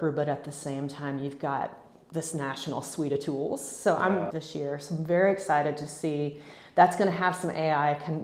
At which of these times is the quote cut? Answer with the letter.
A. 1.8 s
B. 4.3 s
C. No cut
B